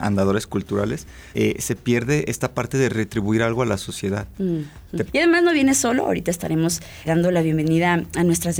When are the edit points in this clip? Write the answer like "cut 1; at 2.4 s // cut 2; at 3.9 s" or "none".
cut 1; at 1.3 s // cut 2; at 5.1 s // cut 3; at 7.0 s